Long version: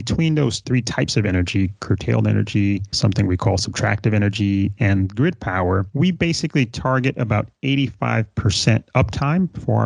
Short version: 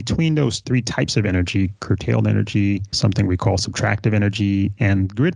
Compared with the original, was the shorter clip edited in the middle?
no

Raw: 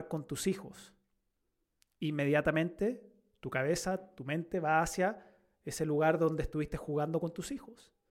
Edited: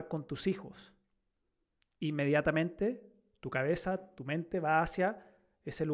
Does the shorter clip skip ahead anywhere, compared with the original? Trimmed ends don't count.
no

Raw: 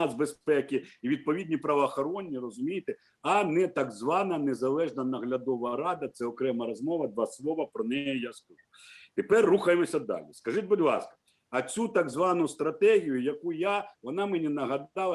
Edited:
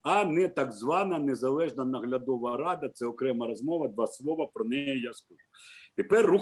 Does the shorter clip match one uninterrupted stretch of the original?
yes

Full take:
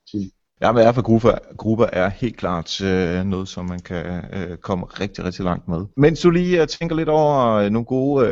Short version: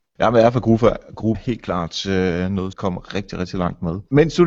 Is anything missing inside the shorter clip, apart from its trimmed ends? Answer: yes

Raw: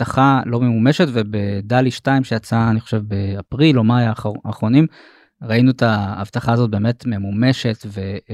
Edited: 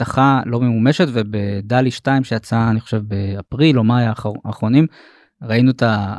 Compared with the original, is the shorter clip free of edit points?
yes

